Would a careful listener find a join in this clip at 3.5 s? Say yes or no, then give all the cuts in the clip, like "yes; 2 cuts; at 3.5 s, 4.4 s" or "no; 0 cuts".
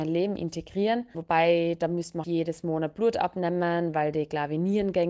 no; 2 cuts; at 1.1 s, 2.2 s